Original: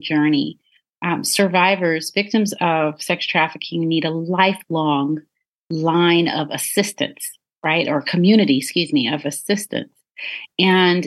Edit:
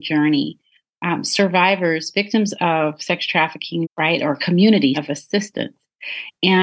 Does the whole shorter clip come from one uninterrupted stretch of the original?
no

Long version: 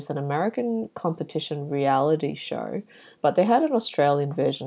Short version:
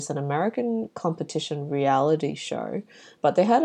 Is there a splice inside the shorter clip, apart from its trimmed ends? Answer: no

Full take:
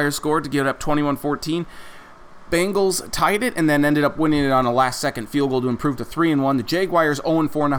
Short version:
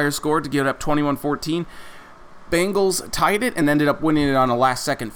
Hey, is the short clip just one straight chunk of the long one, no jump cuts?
no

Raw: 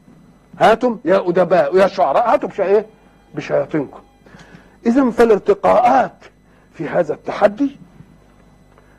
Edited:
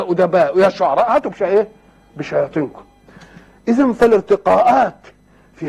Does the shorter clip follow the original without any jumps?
yes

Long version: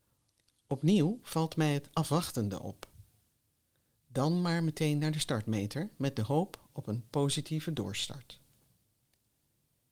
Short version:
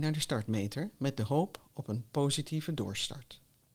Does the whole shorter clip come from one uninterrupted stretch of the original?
yes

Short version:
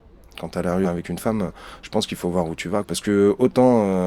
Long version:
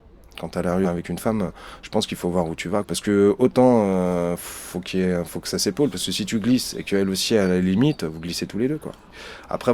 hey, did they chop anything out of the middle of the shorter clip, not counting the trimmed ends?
no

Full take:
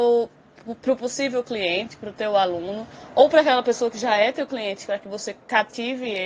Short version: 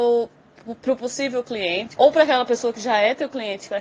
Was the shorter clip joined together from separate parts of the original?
yes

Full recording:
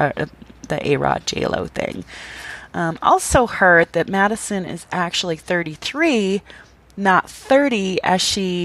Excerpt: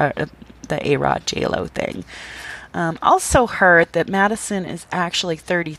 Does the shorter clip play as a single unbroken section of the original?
yes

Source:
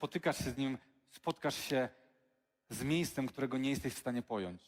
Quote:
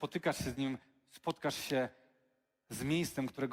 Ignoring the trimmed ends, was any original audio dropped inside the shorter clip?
no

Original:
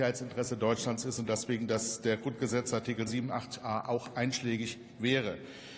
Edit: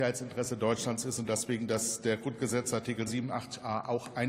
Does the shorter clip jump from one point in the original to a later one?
no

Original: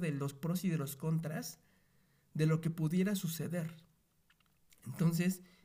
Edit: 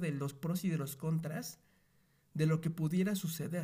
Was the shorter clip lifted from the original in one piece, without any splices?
yes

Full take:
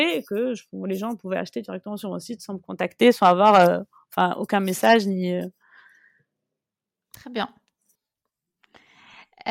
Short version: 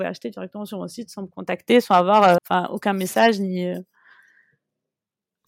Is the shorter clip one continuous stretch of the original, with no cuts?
no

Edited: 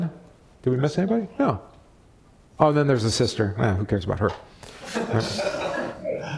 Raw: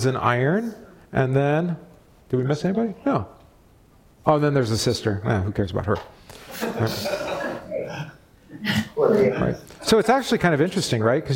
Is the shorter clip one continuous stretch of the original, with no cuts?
yes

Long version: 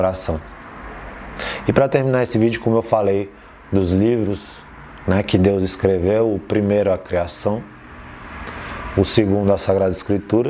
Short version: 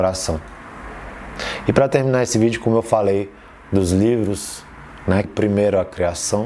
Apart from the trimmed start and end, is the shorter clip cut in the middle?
yes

